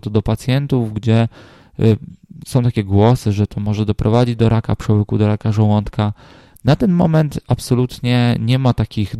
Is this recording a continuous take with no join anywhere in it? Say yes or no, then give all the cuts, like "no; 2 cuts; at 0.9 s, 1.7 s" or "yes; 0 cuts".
yes; 0 cuts